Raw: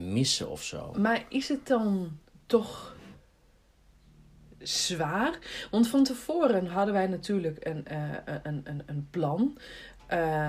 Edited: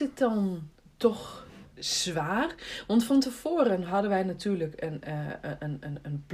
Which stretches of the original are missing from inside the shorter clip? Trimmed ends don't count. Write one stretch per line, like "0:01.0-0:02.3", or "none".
0:03.2-0:04.6